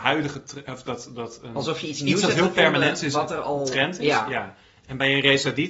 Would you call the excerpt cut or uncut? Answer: uncut